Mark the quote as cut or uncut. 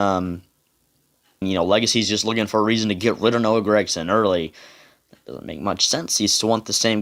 cut